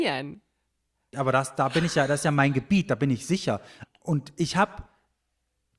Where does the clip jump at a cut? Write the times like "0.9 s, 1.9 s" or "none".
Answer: 1.1 s, 3.8 s